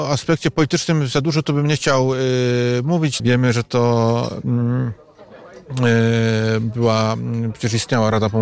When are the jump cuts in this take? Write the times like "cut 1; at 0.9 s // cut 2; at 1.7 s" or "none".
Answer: cut 1; at 3.2 s